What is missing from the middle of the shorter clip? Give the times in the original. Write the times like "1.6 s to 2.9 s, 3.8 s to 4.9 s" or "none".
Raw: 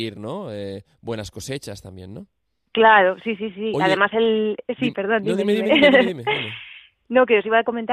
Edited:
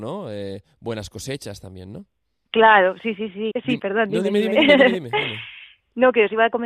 3.7 s to 4.6 s